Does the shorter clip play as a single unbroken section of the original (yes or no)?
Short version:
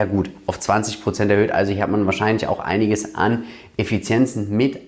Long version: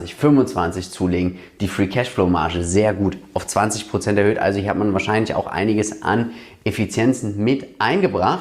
yes